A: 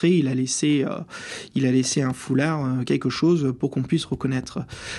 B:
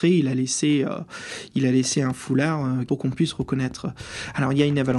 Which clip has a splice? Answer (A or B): B